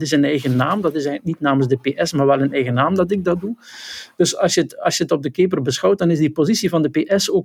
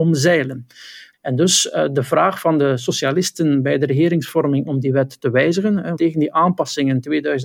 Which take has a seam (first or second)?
second